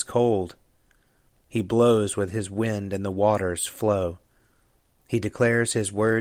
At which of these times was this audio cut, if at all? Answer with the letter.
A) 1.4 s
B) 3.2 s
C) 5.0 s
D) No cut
A